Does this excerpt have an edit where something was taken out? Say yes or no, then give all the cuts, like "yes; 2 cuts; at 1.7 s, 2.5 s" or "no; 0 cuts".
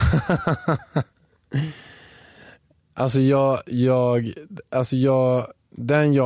no; 0 cuts